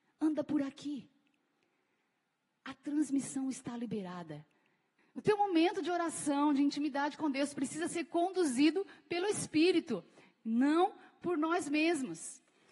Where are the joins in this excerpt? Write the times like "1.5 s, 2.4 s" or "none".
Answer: 5.0 s